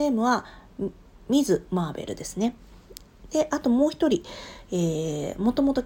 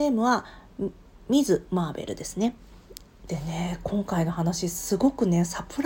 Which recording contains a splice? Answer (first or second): second